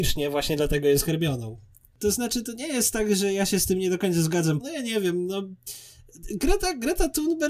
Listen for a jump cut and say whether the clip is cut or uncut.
cut